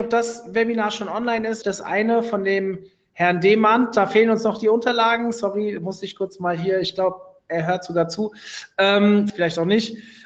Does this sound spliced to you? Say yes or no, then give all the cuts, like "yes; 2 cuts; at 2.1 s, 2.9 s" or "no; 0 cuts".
yes; 2 cuts; at 1.6 s, 9.3 s